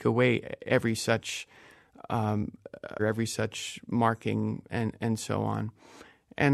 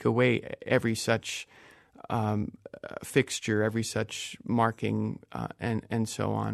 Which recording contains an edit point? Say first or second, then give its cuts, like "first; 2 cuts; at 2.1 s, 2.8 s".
first; 2 cuts; at 3.0 s, 4.7 s